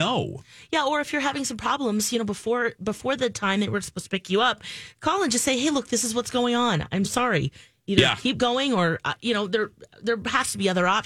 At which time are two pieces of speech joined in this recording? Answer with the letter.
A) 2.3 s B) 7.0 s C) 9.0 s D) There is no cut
B